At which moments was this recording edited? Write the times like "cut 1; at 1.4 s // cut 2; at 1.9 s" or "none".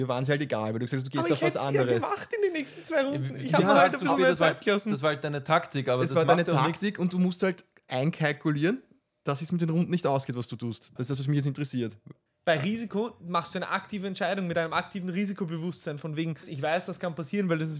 cut 1; at 11.0 s // cut 2; at 12.3 s // cut 3; at 16.4 s